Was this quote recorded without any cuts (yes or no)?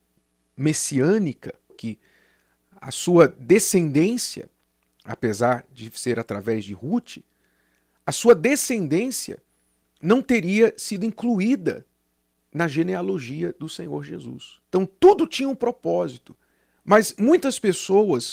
no